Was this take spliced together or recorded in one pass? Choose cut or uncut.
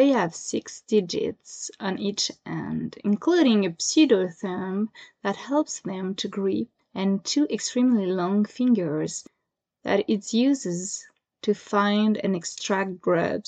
uncut